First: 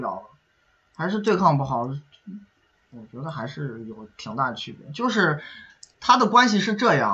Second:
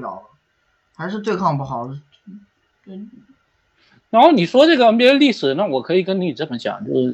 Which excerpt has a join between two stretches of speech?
first; 1 cut; at 2.8 s

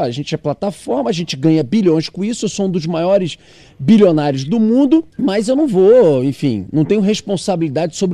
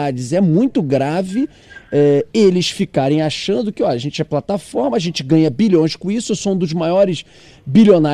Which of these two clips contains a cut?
first; 1 cut; at 5.1 s

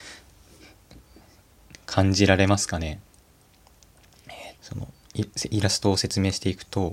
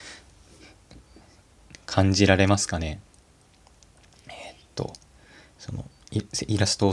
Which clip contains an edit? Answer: first; 1 cut; at 4.5 s

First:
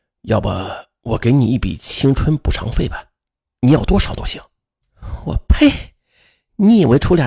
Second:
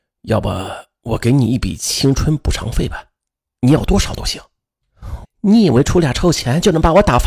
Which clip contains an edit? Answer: second; 1 cut; at 5.2 s

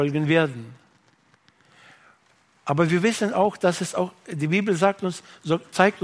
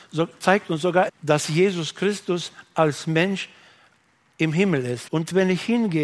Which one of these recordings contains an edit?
second; 2 cuts; at 1.1 s, 5.1 s

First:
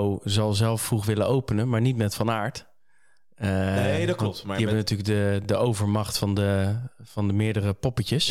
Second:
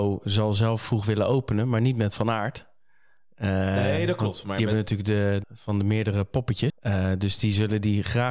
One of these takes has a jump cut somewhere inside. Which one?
second; 2 cuts; at 5.4 s, 6.7 s

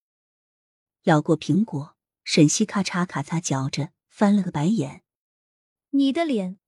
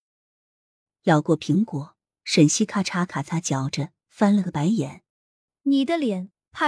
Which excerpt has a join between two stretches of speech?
second; 1 cut; at 5.1 s

